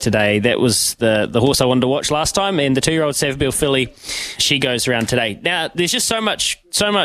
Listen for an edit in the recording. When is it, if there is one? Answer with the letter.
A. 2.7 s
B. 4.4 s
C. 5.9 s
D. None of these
B